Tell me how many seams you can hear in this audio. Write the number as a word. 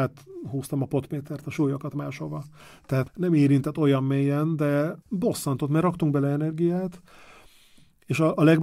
two